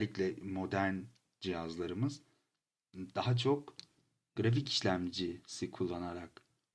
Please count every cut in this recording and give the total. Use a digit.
0